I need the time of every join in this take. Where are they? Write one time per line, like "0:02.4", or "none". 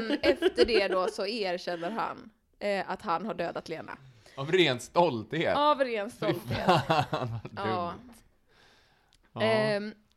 none